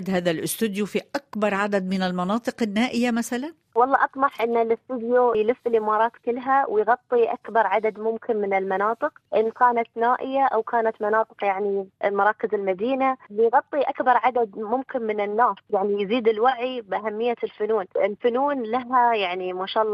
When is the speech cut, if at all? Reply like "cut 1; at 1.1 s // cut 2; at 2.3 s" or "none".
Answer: cut 1; at 9.3 s